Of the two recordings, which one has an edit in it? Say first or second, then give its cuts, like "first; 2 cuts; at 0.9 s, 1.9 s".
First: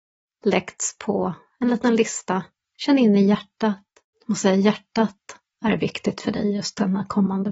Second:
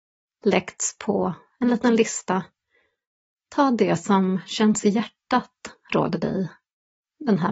first; 2 cuts; at 2.6 s, 4.1 s